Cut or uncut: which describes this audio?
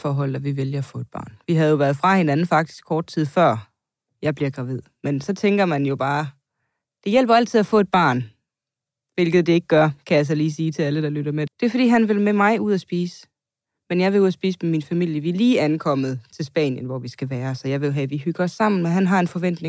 cut